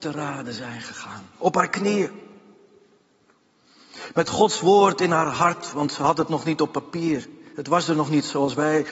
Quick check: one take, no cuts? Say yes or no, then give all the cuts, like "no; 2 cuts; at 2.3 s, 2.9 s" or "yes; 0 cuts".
yes; 0 cuts